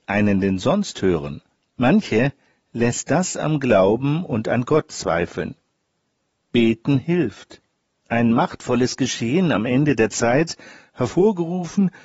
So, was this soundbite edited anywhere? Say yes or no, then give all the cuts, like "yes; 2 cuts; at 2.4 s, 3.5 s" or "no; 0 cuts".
yes; 2 cuts; at 1.6 s, 8.0 s